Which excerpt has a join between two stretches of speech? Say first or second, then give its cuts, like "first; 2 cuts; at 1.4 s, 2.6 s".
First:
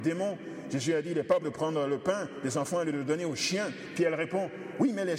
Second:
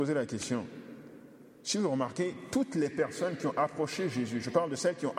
first; 1 cut; at 1.4 s